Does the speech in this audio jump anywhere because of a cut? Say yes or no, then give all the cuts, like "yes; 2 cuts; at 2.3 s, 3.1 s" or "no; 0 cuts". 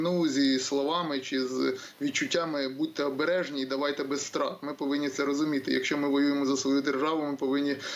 no; 0 cuts